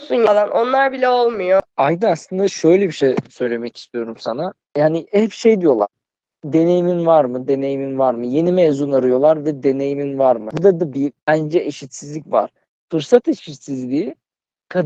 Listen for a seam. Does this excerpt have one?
no; 0 cuts

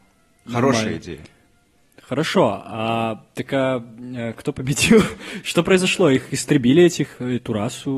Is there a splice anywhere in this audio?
no; 0 cuts

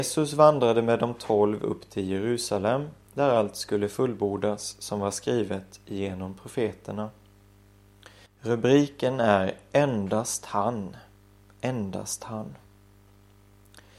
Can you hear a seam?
yes; 1 cut; at 8.3 s

